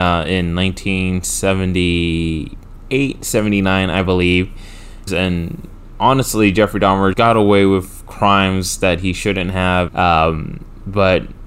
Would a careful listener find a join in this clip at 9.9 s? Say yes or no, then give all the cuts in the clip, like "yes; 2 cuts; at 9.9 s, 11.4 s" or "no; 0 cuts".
yes; 3 cuts; at 5.1 s, 7.1 s, 9.9 s